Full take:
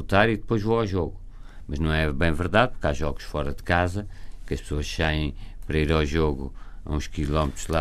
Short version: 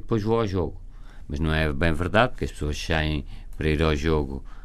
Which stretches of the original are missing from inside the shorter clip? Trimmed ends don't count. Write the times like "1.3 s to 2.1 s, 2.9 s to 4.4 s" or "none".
2.7 s to 4.4 s